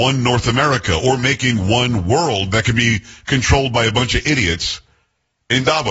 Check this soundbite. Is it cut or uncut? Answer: uncut